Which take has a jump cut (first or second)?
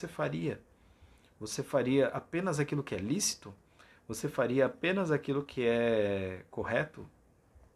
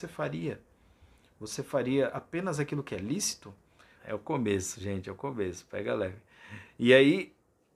second